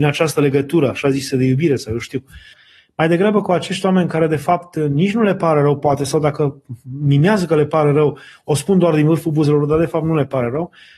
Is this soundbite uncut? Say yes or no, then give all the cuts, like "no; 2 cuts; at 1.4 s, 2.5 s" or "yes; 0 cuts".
no; 1 cut; at 2.5 s